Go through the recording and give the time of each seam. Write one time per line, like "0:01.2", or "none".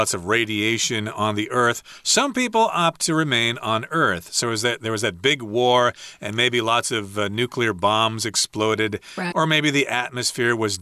0:09.3